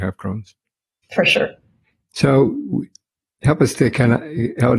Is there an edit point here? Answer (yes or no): yes